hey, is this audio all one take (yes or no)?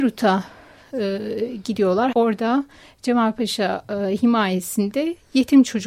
no